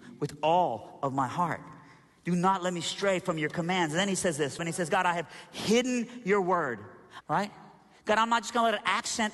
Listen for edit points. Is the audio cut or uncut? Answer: cut